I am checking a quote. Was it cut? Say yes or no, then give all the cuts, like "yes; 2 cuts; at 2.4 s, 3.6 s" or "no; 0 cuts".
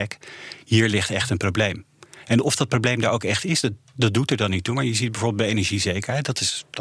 no; 0 cuts